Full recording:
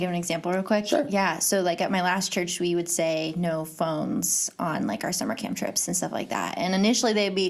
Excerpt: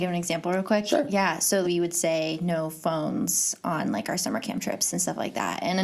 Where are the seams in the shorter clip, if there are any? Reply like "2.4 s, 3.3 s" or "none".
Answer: 1.6 s